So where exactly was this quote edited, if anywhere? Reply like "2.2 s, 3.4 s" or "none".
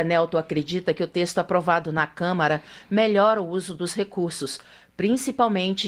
none